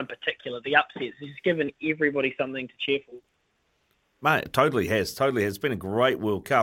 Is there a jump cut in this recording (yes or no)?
no